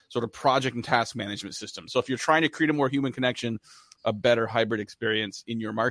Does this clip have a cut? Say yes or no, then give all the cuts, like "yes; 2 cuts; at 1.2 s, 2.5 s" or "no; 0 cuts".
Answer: yes; 1 cut; at 1.9 s